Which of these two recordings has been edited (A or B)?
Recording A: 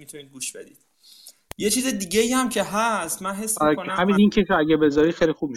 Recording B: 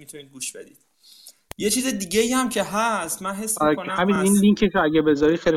A